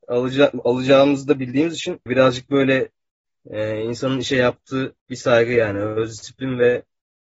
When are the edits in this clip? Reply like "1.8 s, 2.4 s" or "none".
5.0 s